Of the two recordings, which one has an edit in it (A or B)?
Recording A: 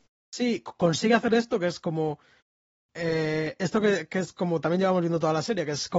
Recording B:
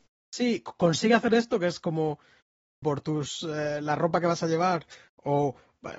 B